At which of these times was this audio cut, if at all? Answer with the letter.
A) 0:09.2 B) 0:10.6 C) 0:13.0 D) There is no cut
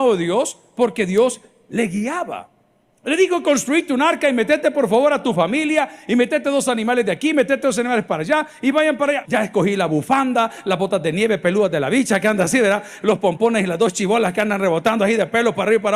A